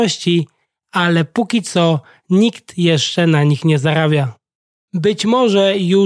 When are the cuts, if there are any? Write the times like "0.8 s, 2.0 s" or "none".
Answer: 4.8 s